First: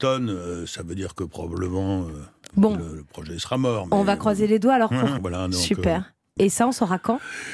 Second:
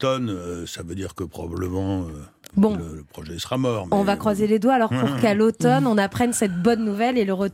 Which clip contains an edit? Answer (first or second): first